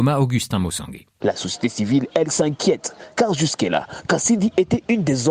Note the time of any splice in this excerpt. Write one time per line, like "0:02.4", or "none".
0:01.2